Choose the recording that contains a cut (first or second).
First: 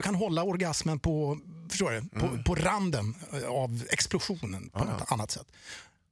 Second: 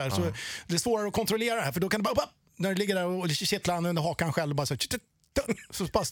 first